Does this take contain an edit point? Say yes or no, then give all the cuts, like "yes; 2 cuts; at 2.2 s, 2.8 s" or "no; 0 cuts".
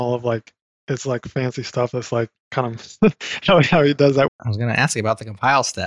yes; 1 cut; at 4.3 s